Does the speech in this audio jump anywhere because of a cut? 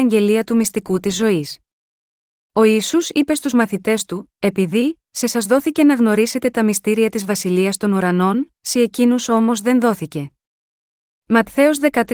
no; 0 cuts

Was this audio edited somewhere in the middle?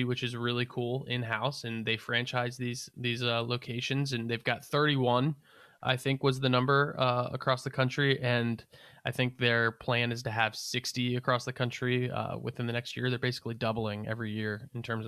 no; 0 cuts

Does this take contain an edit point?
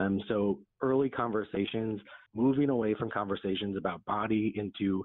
yes; 1 cut; at 2.3 s

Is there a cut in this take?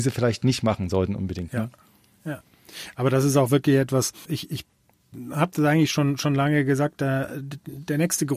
yes; 1 cut; at 4.3 s

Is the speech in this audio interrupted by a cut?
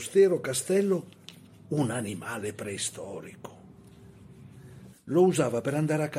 yes; 1 cut; at 4.9 s

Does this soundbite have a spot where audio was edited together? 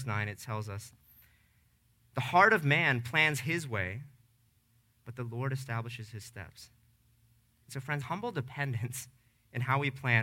yes; 1 cut; at 8.0 s

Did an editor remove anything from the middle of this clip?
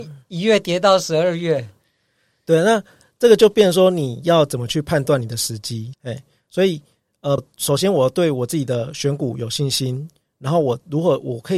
yes; 2 cuts; at 5.9 s, 7.4 s

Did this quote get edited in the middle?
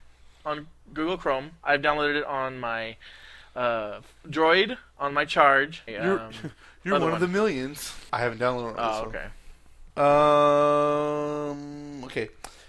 yes; 3 cuts; at 5.9 s, 8.1 s, 9.9 s

